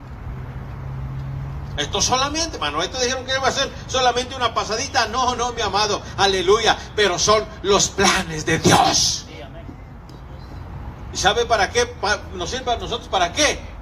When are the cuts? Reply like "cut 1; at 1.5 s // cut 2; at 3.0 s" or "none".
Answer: none